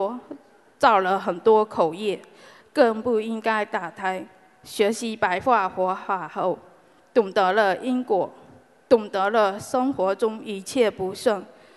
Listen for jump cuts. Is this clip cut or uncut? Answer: uncut